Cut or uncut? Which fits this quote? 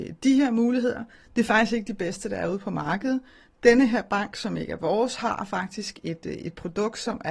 uncut